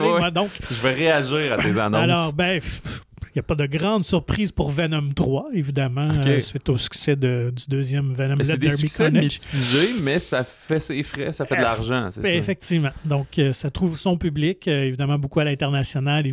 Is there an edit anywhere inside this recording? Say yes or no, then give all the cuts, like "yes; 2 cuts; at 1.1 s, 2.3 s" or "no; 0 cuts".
no; 0 cuts